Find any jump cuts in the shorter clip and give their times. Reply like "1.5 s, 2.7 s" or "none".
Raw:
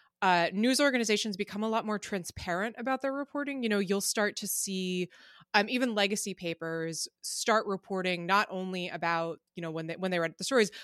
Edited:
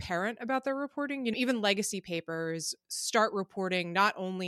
1.3 s